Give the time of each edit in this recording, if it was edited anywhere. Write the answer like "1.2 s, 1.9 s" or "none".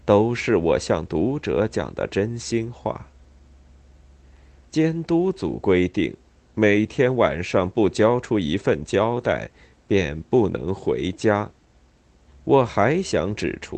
4.6 s, 12.3 s

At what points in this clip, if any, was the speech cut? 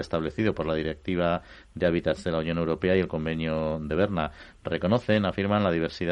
none

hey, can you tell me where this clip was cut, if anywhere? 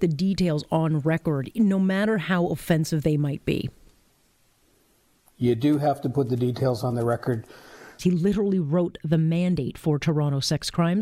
8.0 s

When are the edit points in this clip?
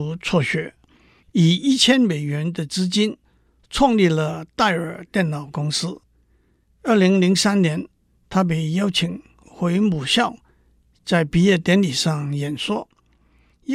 none

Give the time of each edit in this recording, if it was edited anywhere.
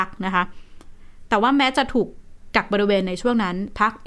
none

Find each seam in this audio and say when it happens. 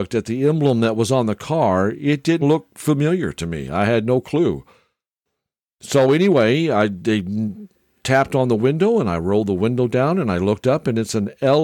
2.4 s

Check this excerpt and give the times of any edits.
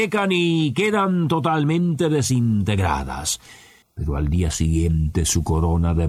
3.8 s

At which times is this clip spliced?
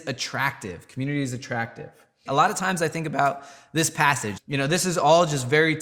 2.3 s, 4.4 s

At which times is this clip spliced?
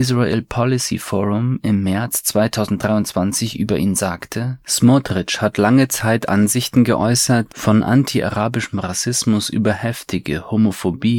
4.6 s, 7.5 s

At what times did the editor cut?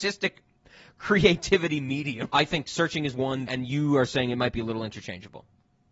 2.3 s, 3.5 s

